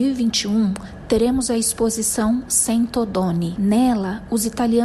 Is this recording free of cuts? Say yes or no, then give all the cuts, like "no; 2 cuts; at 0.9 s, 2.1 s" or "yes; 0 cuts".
no; 1 cut; at 3.6 s